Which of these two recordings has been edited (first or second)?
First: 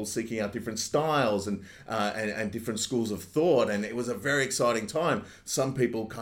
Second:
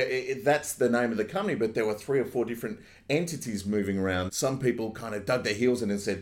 second